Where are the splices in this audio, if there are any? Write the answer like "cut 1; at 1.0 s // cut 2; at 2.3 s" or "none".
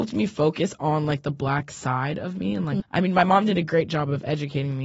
cut 1; at 2.8 s